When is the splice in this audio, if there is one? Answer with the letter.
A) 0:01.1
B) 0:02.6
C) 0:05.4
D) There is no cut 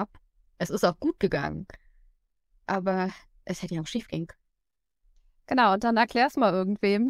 D